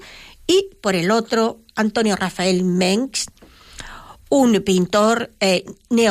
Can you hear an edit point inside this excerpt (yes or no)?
no